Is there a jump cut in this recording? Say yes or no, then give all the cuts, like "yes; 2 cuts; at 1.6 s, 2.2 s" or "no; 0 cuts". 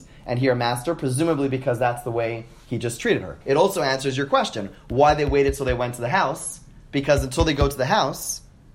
yes; 1 cut; at 3.4 s